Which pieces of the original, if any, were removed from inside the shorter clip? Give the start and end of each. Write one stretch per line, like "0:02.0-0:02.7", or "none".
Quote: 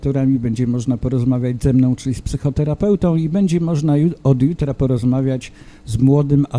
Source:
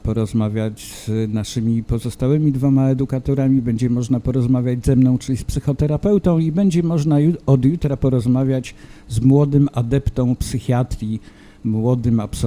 none